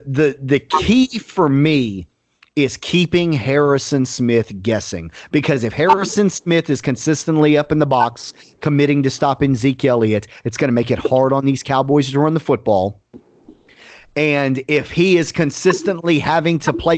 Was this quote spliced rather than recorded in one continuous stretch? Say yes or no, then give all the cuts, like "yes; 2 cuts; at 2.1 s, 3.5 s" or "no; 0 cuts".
no; 0 cuts